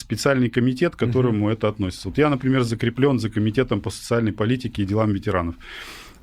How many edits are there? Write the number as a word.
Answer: zero